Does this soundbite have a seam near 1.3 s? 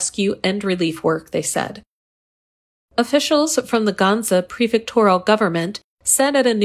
no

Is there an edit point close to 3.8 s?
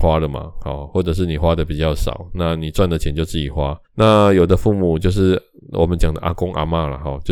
yes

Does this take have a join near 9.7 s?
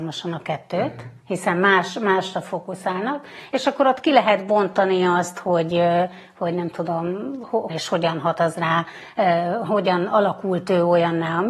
yes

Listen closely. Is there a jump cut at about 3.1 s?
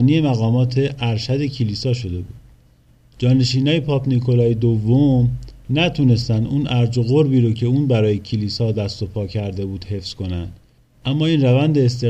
yes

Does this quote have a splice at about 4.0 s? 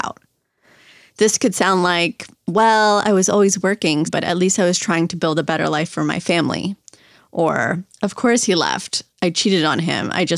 yes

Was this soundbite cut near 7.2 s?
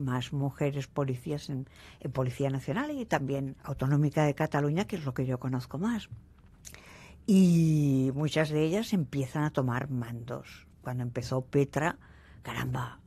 no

